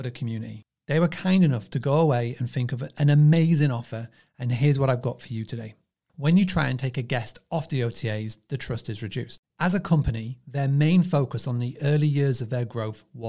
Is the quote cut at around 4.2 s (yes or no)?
no